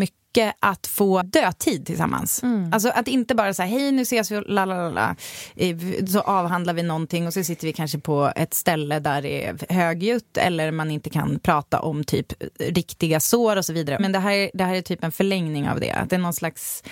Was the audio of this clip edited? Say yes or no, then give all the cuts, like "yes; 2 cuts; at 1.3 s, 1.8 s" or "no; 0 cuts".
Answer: yes; 2 cuts; at 1.2 s, 14.0 s